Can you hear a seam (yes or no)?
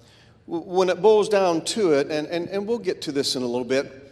no